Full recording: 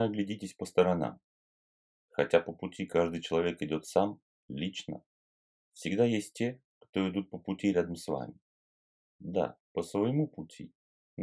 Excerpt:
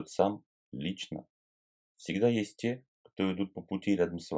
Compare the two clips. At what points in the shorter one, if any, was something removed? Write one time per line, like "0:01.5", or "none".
none